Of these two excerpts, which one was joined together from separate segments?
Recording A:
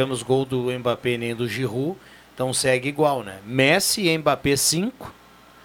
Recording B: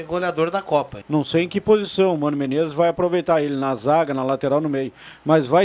B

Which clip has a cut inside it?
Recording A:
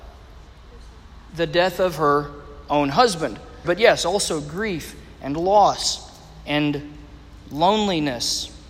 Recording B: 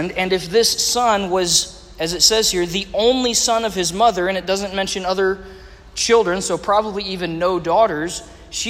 A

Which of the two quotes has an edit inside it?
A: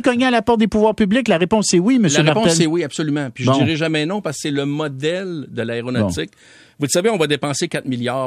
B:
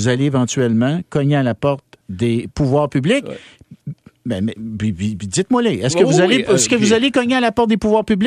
B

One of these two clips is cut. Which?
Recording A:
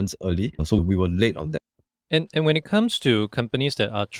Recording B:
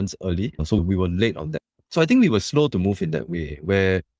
B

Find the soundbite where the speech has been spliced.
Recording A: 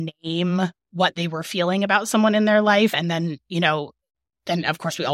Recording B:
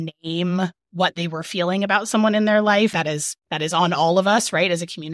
B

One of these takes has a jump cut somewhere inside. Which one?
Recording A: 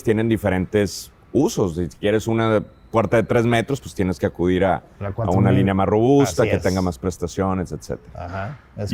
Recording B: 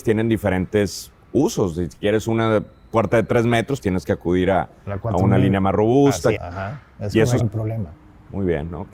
B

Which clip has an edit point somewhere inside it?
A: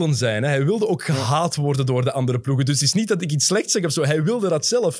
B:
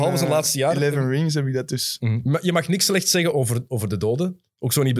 B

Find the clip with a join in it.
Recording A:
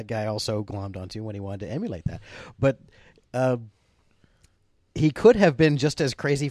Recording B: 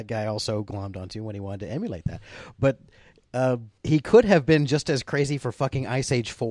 B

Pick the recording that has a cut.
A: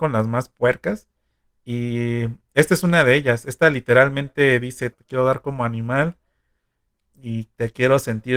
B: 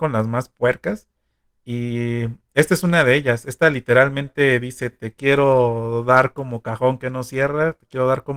A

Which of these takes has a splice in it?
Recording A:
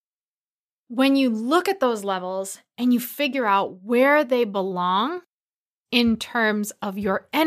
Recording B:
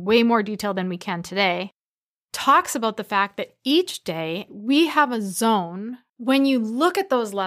B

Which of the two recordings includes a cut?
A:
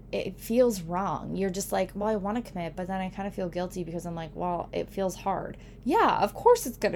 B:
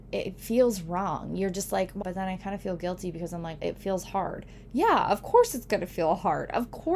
B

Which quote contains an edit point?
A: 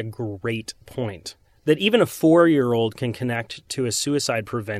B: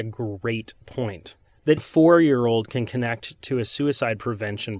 B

